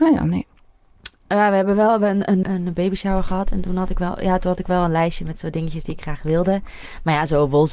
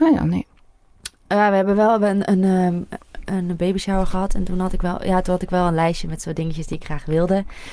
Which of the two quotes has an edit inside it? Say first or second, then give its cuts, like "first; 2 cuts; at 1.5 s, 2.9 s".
first; 1 cut; at 2.4 s